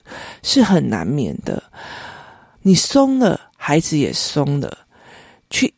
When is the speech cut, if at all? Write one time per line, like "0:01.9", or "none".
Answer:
0:02.6